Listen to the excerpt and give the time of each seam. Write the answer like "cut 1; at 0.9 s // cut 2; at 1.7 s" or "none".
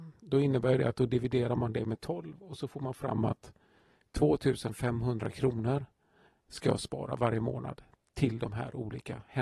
none